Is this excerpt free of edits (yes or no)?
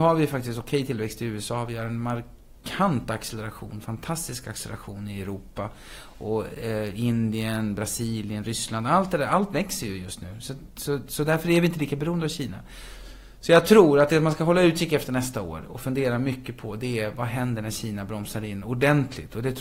yes